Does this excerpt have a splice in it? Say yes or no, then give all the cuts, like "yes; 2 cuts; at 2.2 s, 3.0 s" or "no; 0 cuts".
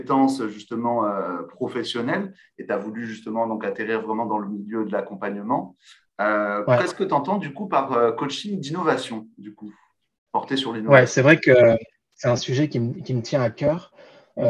no; 0 cuts